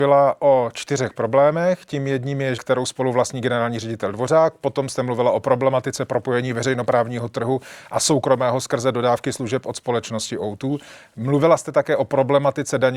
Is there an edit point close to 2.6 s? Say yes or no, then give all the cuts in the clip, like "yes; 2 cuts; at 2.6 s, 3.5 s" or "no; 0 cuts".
yes; 1 cut; at 2.6 s